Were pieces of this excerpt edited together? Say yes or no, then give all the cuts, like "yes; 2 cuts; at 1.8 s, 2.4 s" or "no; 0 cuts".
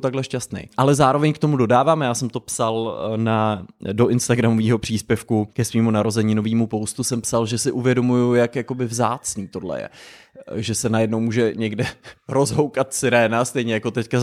no; 0 cuts